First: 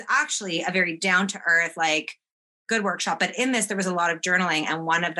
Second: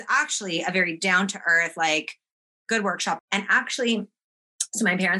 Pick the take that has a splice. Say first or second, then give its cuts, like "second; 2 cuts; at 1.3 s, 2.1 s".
second; 1 cut; at 3.2 s